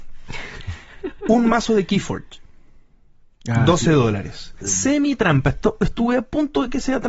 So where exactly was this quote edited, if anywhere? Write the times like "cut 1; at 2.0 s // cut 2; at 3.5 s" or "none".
cut 1; at 4.6 s